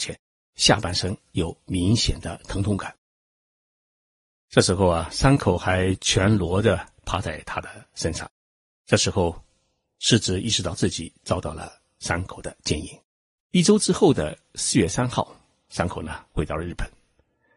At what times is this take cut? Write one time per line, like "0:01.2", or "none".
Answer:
0:13.3